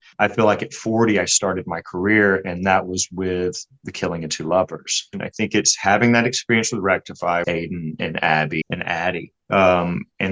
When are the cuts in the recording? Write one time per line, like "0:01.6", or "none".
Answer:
0:05.1
0:07.4
0:08.6

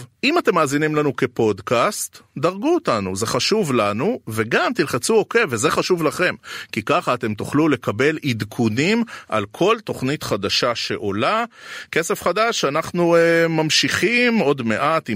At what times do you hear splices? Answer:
none

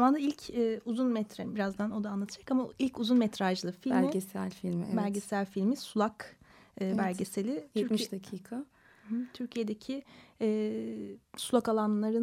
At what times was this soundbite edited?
none

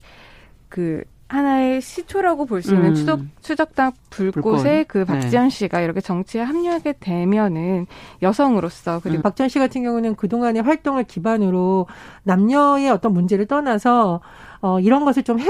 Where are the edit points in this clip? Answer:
0:09.2

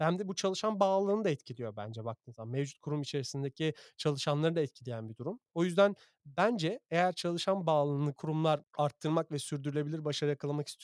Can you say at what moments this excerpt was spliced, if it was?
none

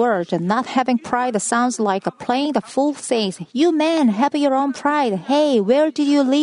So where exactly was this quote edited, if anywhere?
none

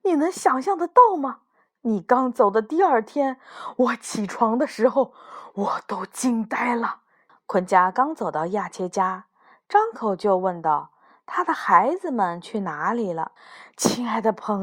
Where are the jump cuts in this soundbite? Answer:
0:07.3
0:13.4

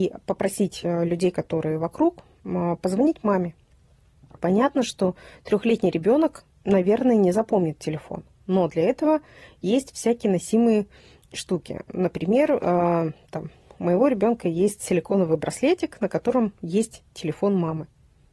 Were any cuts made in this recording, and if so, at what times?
0:04.4

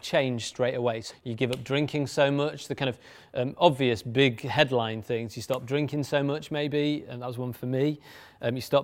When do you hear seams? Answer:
0:01.1

